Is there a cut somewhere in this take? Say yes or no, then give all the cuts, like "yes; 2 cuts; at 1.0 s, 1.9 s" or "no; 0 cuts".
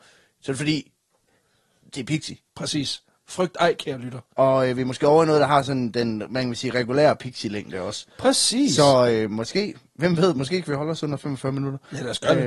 no; 0 cuts